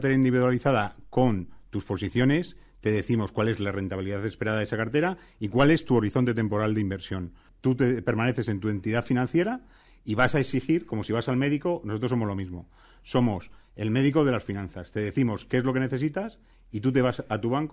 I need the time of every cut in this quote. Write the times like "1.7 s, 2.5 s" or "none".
7.5 s